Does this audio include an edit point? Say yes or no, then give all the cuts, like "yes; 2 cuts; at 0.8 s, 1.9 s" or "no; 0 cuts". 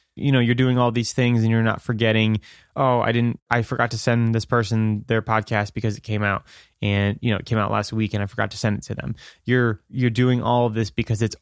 no; 0 cuts